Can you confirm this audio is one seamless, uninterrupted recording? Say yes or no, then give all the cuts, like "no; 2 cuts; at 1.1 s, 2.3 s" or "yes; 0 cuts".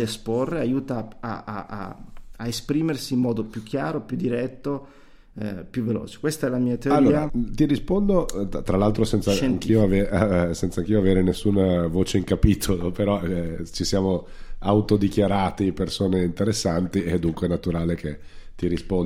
no; 1 cut; at 7.3 s